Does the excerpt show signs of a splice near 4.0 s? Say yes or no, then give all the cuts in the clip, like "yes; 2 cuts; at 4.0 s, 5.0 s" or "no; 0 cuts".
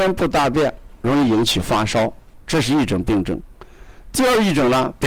no; 1 cut; at 1.0 s